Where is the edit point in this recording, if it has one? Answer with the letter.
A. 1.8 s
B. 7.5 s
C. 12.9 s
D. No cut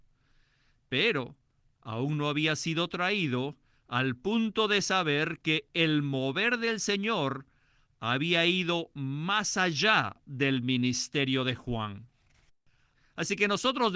C